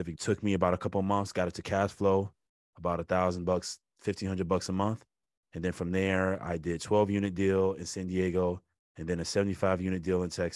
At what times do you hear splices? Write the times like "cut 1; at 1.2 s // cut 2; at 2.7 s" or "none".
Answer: none